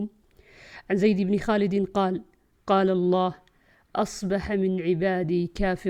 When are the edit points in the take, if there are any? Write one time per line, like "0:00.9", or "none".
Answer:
0:02.5

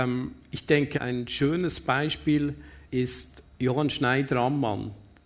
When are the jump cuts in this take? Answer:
0:00.9
0:02.9

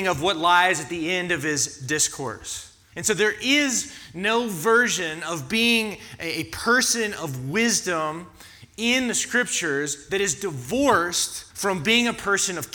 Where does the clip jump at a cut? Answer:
0:02.9
0:11.5

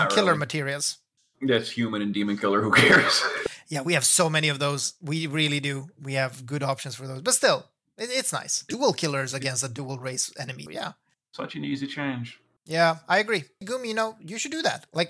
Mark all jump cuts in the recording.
0:08.7
0:10.7
0:13.6

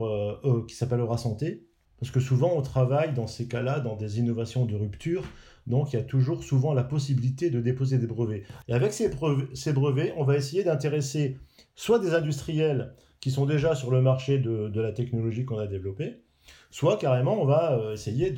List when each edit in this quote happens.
0:01.8
0:08.6

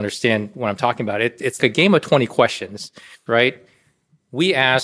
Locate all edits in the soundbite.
0:01.6
0:03.3

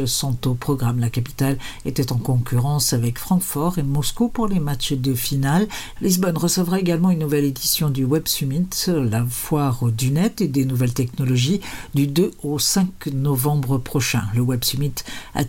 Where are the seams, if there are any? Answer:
0:06.0

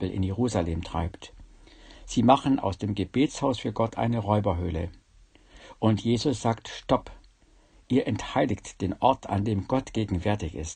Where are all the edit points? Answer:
none

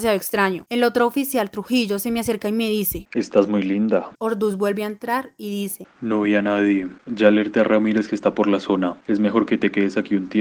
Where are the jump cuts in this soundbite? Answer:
0:04.2

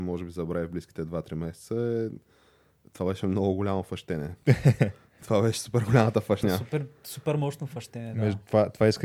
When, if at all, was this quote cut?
none

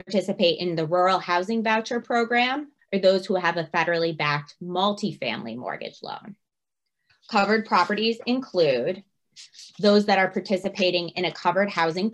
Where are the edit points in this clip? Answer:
0:02.8
0:07.1
0:09.7

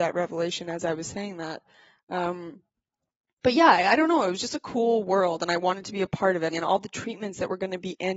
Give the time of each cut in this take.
0:06.5

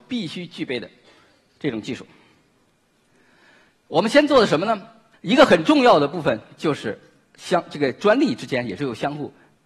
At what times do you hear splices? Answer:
0:05.1

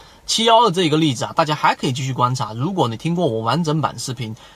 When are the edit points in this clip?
none

